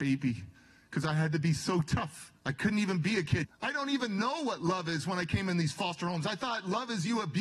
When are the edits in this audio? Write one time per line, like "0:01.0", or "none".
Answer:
0:02.4
0:03.4